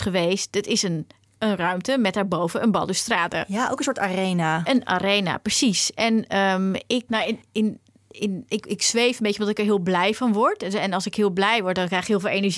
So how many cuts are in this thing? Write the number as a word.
one